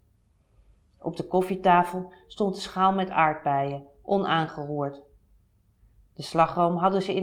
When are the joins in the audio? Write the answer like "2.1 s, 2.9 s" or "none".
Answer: 6.1 s

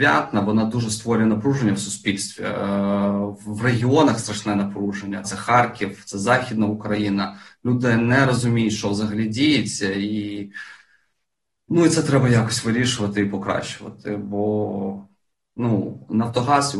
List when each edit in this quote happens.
5.2 s

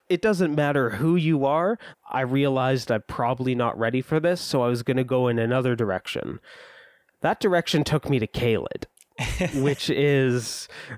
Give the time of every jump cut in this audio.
1.9 s

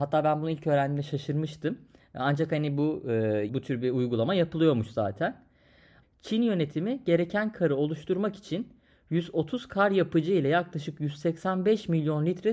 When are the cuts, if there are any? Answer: 3.5 s, 6.0 s

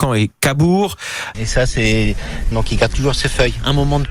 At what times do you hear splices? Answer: 1.3 s, 2.5 s

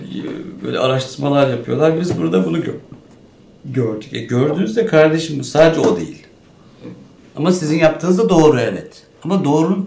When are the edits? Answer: none

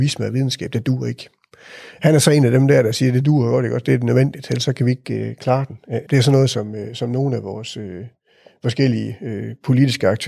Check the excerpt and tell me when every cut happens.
6.0 s

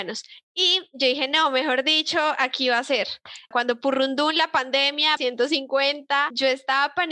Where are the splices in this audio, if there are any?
3.5 s, 5.2 s

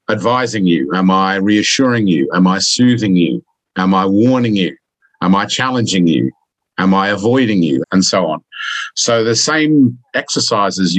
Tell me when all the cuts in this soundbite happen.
7.8 s

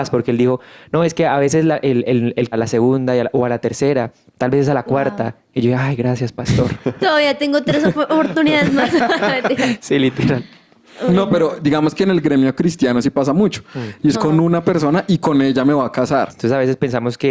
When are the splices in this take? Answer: 2.5 s, 14.1 s, 16.3 s

